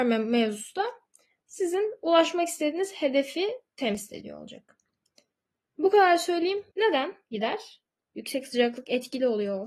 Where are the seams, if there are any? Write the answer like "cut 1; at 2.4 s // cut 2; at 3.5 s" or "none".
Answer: cut 1; at 6.7 s // cut 2; at 8.0 s